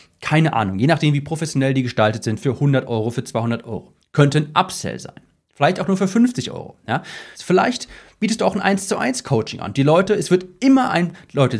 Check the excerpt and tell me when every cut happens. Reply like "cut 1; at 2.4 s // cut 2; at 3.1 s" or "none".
cut 1; at 7.3 s